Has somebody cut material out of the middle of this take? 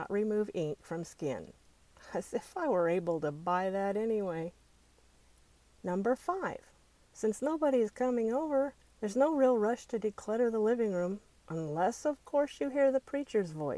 no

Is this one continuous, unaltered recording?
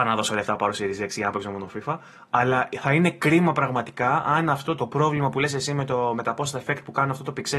no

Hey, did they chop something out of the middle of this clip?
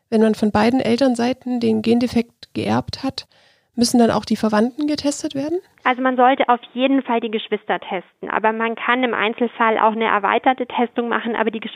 no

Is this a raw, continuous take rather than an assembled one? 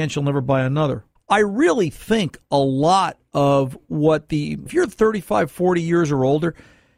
no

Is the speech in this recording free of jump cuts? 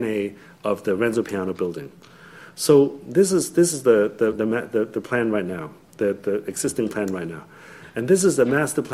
yes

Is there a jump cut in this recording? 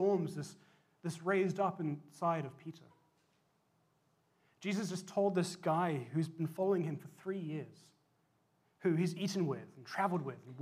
no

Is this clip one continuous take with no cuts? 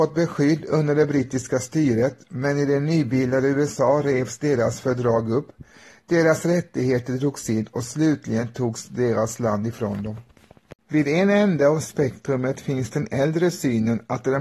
no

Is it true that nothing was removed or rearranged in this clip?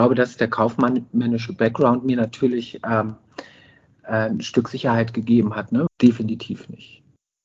no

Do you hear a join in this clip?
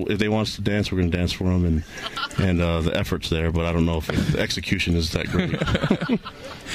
no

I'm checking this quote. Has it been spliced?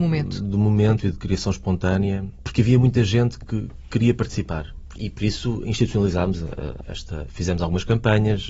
yes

